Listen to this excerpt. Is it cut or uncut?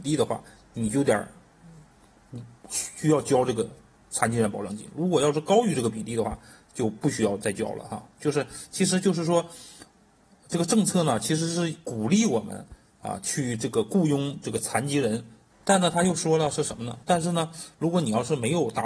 cut